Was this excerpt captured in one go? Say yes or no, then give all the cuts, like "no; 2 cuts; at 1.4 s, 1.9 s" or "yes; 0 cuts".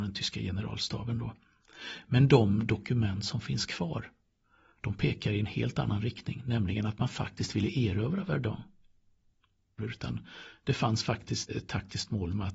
no; 2 cuts; at 9.8 s, 11.5 s